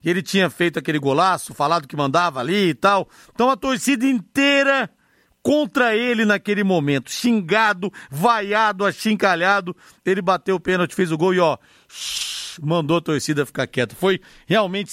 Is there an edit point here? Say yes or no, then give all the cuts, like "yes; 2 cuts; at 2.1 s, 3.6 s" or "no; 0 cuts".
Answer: no; 0 cuts